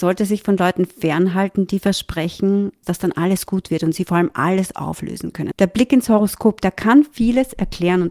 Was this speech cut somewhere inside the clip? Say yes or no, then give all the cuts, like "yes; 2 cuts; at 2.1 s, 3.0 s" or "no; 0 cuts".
yes; 2 cuts; at 2.8 s, 5.5 s